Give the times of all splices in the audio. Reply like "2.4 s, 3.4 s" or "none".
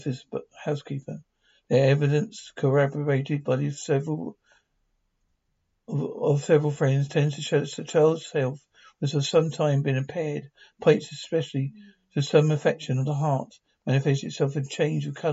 none

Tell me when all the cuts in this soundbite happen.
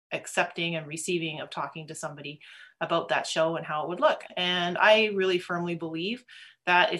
4.2 s

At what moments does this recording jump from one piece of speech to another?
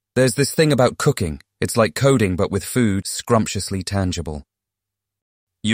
1.5 s, 3.0 s

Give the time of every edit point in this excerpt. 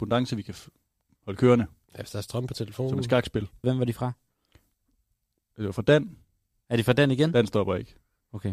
3.6 s

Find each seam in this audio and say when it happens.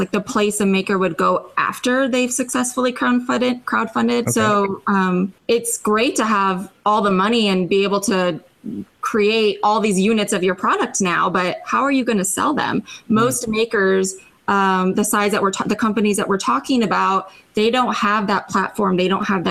4.2 s, 5.4 s

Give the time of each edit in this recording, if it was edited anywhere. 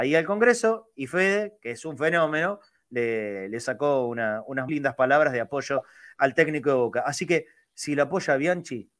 4.7 s

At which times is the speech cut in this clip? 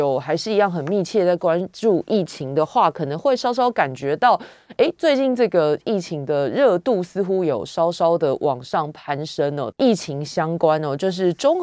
9.7 s

